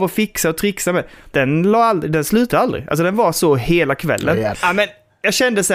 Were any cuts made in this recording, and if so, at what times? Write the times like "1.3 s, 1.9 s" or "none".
1.3 s, 4.5 s